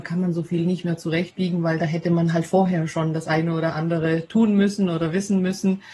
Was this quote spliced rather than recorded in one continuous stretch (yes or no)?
no